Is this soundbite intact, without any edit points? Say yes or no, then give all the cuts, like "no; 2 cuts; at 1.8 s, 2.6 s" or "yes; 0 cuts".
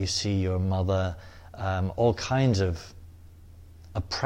yes; 0 cuts